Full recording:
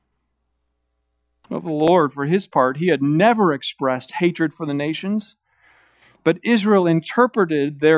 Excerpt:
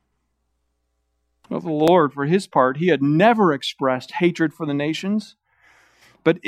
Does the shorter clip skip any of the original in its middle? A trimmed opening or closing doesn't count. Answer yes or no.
no